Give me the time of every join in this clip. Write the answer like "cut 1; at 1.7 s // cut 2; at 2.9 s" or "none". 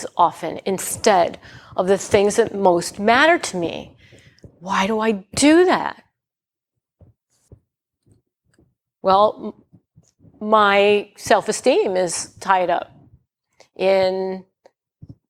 none